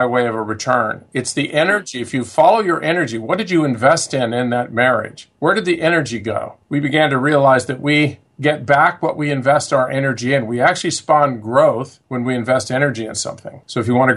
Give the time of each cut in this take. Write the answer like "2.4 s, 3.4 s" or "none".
none